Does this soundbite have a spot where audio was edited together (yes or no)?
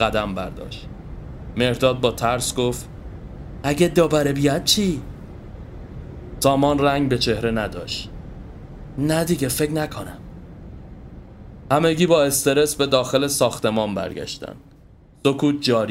no